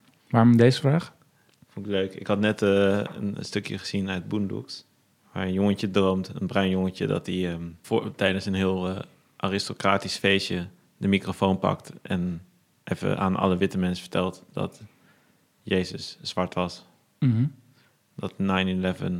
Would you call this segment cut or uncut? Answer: uncut